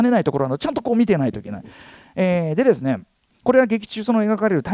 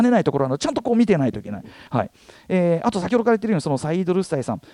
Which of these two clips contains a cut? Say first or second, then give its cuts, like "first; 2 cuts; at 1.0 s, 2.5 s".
second; 1 cut; at 1.9 s